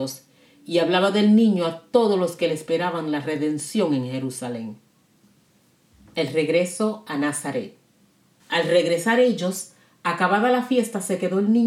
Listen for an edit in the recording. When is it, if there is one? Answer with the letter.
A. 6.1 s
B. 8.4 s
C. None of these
B